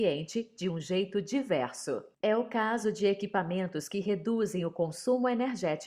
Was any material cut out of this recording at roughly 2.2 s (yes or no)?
yes